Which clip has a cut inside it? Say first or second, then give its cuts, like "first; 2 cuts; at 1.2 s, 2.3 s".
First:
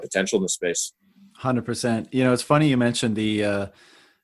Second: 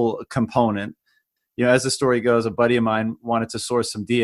second; 1 cut; at 1.4 s